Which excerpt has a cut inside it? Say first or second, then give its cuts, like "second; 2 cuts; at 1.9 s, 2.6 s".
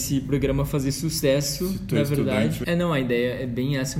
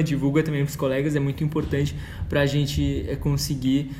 first; 1 cut; at 2.6 s